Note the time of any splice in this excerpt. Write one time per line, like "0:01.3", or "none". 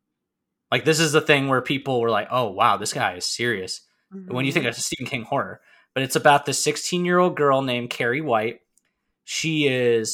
none